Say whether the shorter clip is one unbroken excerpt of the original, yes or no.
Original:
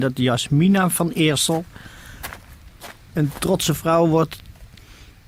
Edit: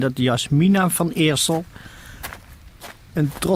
yes